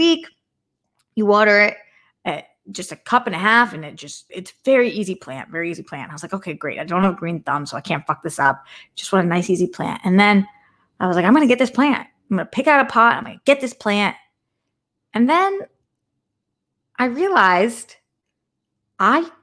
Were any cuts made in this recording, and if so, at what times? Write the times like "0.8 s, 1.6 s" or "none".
4.3 s